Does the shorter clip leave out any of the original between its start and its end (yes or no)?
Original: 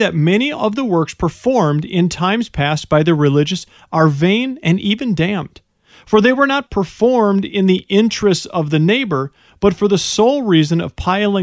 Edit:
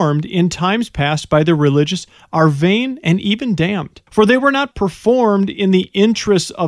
yes